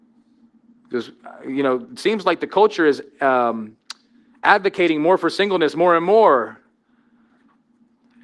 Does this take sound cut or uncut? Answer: uncut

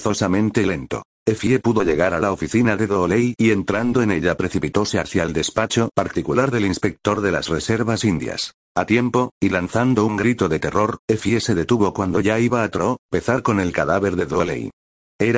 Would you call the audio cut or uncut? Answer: uncut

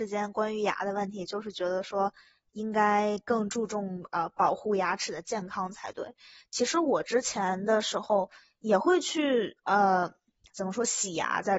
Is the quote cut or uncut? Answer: uncut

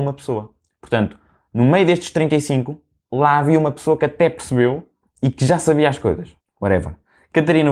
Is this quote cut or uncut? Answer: cut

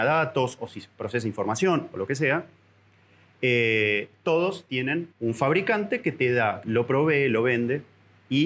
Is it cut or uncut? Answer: cut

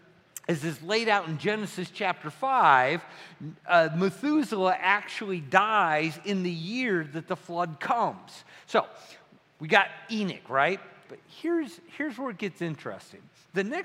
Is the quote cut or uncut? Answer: cut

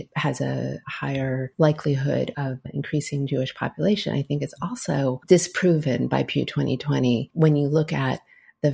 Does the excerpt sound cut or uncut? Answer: uncut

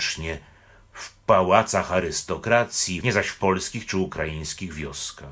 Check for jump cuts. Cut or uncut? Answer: cut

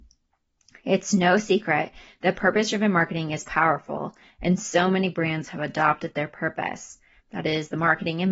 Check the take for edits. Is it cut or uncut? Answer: cut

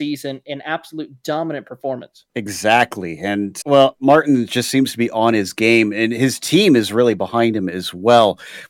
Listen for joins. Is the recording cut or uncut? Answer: cut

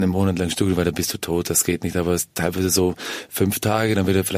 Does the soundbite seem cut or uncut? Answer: uncut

